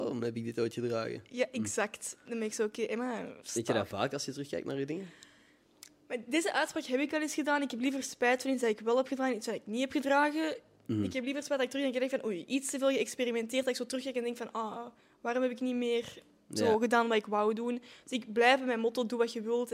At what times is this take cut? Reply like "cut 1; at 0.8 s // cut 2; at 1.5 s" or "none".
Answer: none

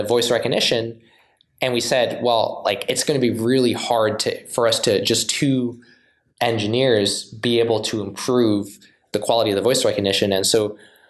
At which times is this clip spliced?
none

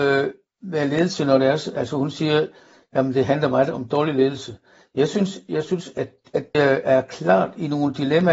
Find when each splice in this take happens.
cut 1; at 6.5 s

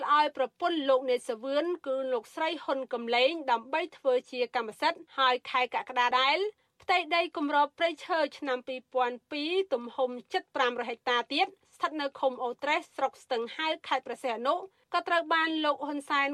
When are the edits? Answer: cut 1; at 5.1 s // cut 2; at 6.1 s

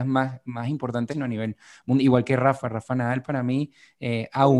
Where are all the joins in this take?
cut 1; at 1.1 s

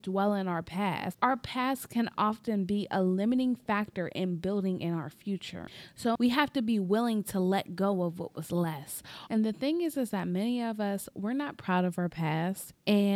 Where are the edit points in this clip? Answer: cut 1; at 1.1 s // cut 2; at 6.2 s // cut 3; at 9.3 s

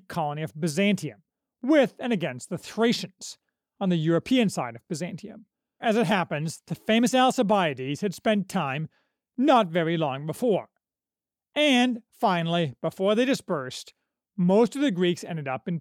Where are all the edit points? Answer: cut 1; at 5.8 s

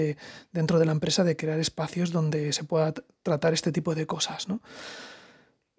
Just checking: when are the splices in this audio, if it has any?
none

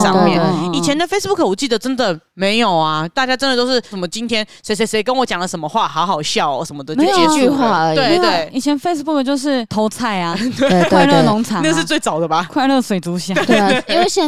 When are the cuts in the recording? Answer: none

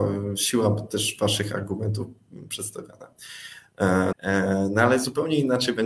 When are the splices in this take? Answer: cut 1; at 4.1 s

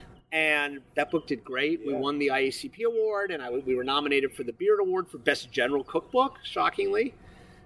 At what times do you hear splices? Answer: none

